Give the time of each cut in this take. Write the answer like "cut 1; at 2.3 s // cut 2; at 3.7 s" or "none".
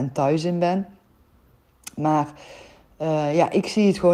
none